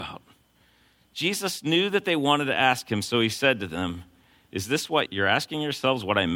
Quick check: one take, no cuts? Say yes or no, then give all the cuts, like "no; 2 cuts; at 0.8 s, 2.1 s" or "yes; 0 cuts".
no; 1 cut; at 5.1 s